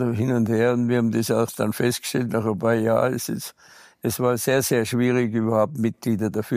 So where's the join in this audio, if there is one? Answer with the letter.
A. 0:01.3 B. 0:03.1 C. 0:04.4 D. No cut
D